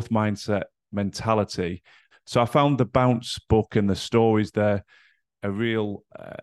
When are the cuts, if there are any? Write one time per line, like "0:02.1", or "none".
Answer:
0:02.1